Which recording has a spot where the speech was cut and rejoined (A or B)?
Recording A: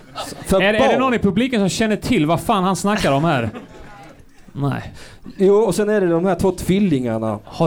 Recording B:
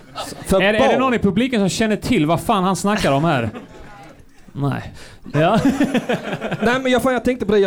B